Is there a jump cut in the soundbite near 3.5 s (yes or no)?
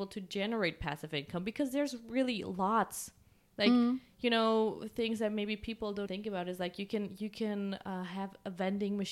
no